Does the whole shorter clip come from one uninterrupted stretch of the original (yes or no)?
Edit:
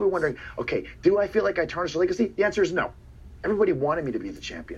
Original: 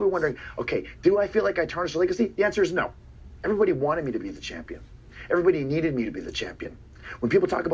yes